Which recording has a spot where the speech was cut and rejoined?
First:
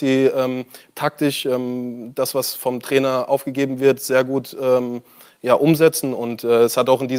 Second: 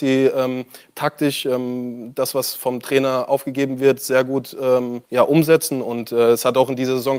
second; 1 cut; at 5.0 s

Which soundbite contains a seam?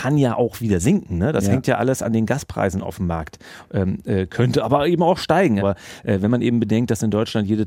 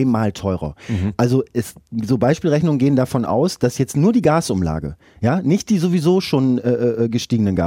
first; 1 cut; at 5.6 s

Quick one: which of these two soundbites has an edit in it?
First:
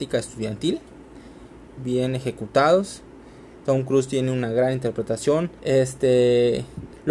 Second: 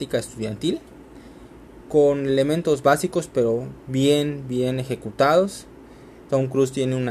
first; 2 cuts; at 1.8 s, 5.6 s

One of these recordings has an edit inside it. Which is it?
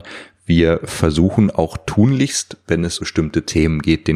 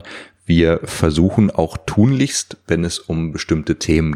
first; 1 cut; at 3.0 s

